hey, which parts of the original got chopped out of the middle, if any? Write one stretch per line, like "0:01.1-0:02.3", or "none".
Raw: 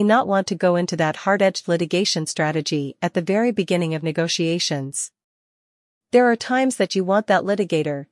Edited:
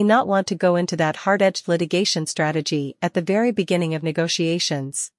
none